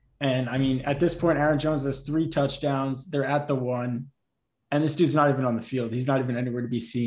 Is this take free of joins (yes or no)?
yes